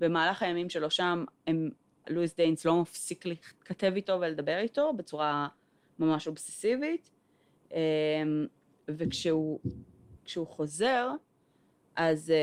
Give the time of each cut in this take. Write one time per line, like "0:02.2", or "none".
0:02.0
0:10.2